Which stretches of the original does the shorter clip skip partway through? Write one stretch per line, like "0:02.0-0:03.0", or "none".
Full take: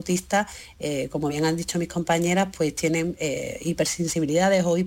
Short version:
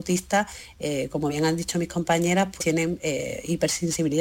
0:02.6-0:02.7

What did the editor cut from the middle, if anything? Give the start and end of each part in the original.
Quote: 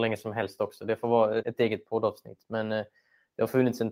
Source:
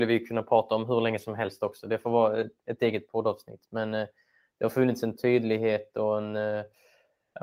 0:02.4-0:02.6

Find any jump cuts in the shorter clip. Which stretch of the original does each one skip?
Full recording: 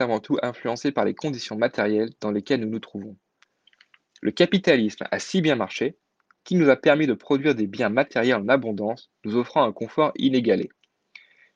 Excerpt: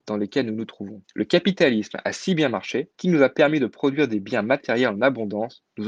0:03.2-0:04.1
0:06.0-0:06.4

